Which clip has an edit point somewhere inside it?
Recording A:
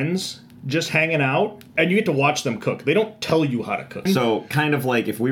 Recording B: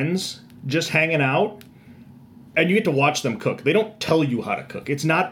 A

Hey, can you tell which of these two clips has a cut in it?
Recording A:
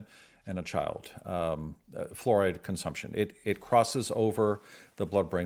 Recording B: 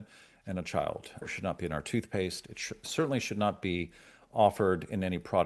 B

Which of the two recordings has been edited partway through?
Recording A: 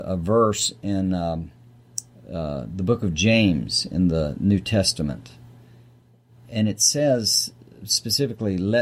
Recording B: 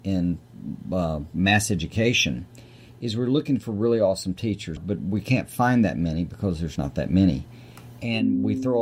B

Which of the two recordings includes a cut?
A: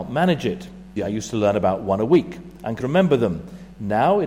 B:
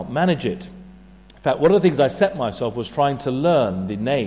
A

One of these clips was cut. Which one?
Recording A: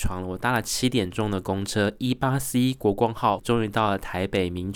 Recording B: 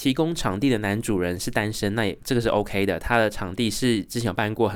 A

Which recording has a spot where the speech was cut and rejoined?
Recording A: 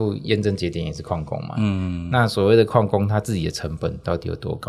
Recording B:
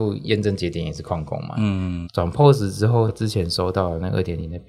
B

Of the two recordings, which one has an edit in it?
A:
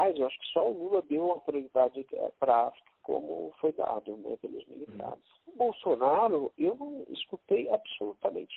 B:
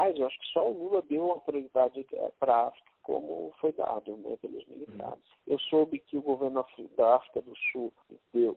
B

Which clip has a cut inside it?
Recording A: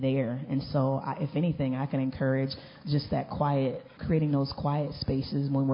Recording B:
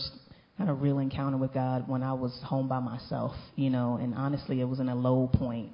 A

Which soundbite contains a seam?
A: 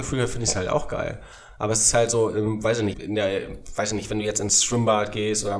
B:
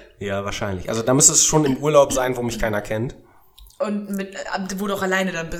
A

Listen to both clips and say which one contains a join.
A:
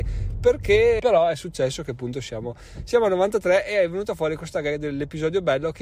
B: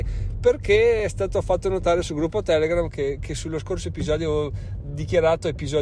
A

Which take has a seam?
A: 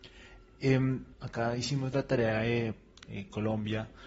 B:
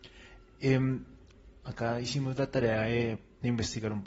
A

